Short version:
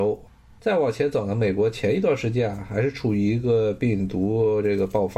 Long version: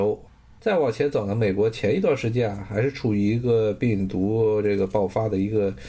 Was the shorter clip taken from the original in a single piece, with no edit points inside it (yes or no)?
yes